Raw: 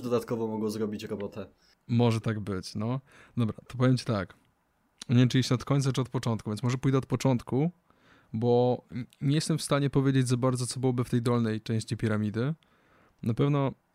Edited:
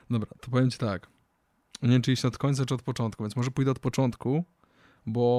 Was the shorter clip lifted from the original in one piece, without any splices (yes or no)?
yes